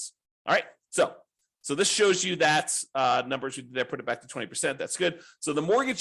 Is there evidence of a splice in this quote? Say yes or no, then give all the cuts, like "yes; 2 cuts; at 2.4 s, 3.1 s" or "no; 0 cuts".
no; 0 cuts